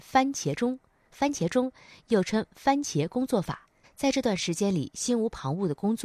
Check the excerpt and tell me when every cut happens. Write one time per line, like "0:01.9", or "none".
0:01.1
0:03.8